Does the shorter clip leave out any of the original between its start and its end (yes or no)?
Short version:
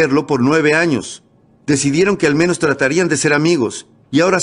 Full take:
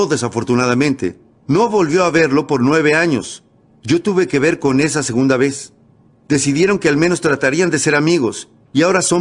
yes